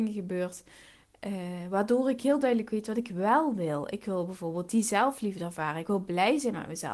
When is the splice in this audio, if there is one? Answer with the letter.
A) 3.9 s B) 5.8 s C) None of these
C